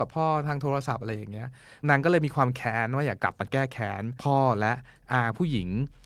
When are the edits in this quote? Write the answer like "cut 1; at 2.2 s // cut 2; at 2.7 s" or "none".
cut 1; at 1.8 s // cut 2; at 3.2 s

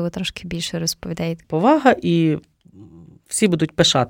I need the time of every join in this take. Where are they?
cut 1; at 1.4 s

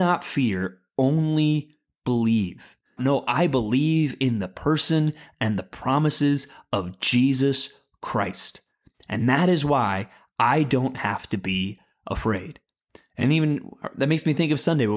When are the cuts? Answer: cut 1; at 3.0 s

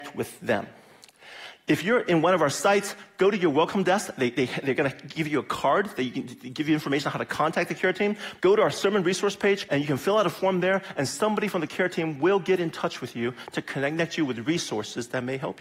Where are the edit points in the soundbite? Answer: cut 1; at 8.4 s // cut 2; at 9.7 s

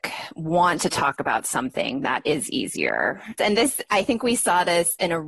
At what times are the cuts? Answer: cut 1; at 3.4 s

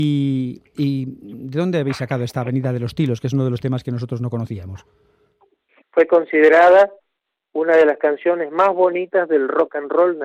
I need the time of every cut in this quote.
cut 1; at 5.8 s

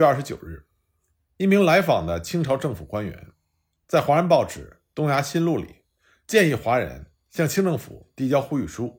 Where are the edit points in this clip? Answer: none

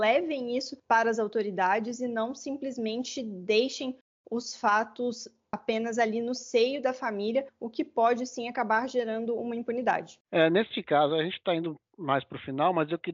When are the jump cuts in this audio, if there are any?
cut 1; at 10.2 s

